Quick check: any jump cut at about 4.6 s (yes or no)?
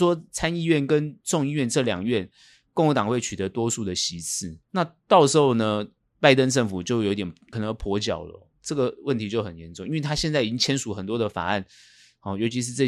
yes